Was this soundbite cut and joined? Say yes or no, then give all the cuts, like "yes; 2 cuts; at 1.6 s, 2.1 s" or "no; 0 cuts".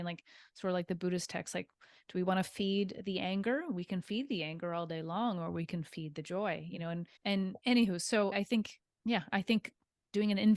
yes; 2 cuts; at 7.2 s, 8.3 s